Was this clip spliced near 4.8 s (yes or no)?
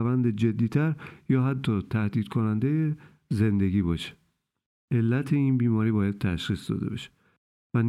yes